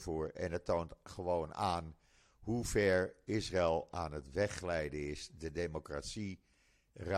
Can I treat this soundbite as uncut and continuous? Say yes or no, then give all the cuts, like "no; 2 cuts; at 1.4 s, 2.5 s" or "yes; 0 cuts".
yes; 0 cuts